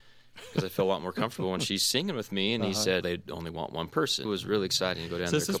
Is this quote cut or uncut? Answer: cut